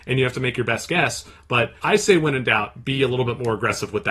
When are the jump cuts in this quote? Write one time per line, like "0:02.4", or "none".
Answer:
0:01.8